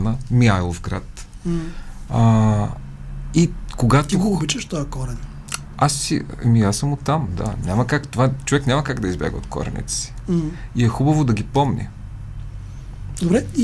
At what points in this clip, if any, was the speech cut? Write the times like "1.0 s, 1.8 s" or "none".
none